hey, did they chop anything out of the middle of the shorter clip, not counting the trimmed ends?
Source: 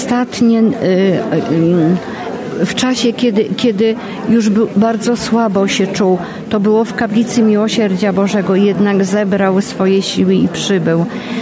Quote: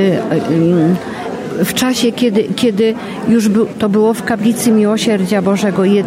yes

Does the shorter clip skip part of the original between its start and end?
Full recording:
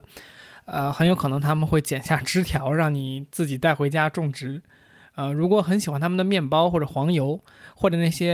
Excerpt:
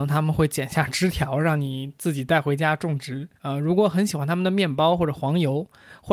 yes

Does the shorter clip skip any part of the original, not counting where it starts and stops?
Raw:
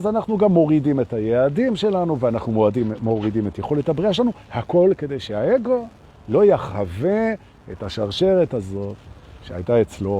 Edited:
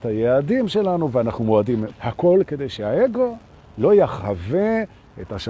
yes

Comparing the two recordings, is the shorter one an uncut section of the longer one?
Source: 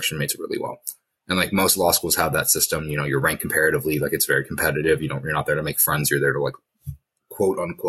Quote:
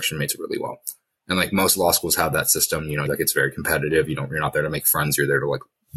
no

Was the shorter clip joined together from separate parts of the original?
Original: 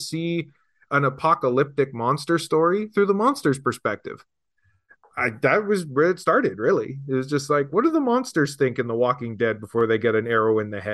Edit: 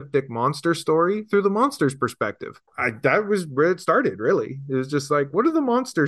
yes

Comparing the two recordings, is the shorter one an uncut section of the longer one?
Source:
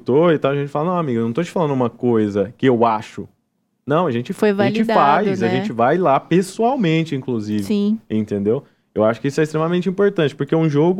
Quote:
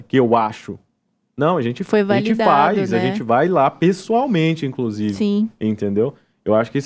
yes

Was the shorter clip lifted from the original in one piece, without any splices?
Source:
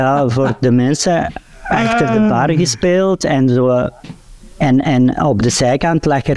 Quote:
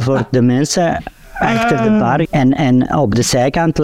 no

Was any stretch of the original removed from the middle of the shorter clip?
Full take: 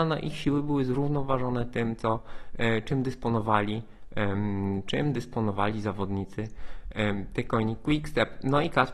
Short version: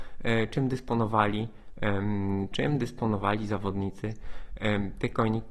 no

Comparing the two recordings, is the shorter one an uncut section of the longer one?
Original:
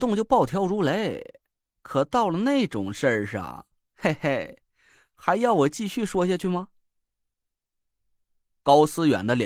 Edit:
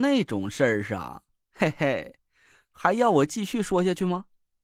yes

